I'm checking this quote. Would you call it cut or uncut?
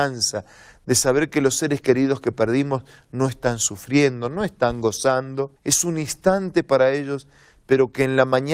cut